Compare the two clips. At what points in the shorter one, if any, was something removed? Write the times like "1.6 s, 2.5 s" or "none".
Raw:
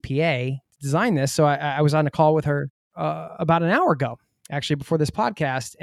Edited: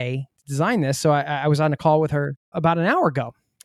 2.5 s